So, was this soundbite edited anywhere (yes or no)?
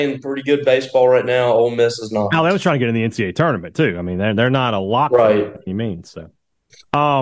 no